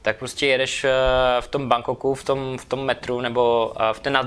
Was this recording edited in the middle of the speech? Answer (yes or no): no